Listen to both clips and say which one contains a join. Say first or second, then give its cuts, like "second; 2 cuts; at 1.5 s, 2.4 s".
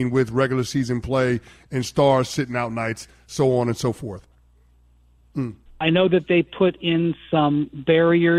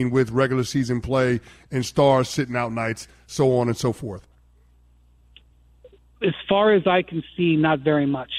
first; 1 cut; at 5.3 s